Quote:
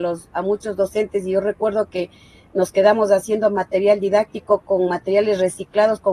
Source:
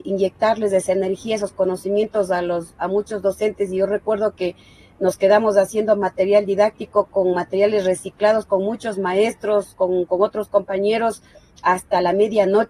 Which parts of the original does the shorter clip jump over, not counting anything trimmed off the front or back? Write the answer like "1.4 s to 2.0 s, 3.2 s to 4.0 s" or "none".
none